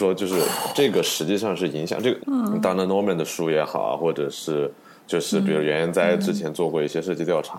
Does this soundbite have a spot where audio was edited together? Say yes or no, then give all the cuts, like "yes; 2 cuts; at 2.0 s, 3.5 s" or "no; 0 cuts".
yes; 1 cut; at 2.2 s